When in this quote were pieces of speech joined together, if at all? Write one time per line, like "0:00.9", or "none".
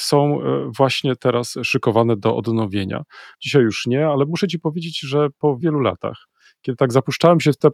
0:03.3
0:05.6